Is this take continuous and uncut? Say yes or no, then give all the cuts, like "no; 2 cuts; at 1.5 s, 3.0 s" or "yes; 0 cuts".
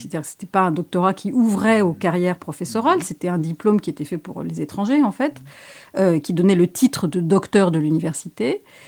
yes; 0 cuts